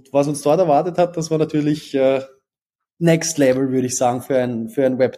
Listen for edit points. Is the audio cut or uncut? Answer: uncut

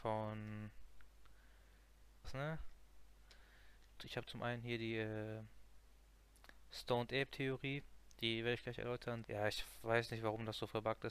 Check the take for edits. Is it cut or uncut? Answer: cut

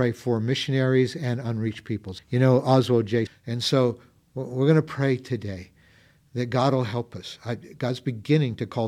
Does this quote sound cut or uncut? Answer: cut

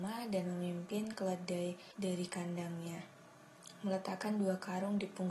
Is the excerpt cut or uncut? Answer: uncut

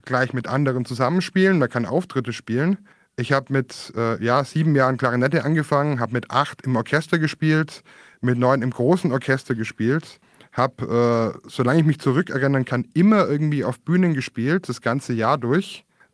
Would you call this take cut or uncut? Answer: uncut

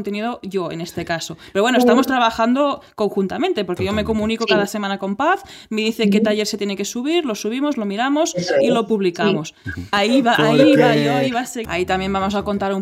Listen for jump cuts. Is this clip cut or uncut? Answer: cut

